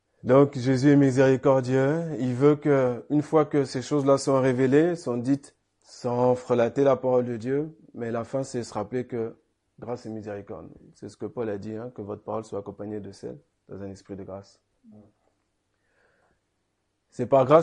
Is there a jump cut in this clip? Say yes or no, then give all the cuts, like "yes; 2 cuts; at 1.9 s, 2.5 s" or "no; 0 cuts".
yes; 1 cut; at 5.6 s